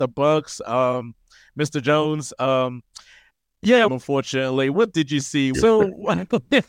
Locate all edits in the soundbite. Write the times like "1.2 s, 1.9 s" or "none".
3.9 s, 5.5 s